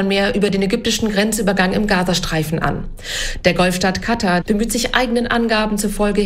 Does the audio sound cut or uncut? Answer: cut